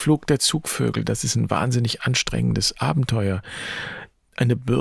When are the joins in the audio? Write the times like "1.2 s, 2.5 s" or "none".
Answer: 1.0 s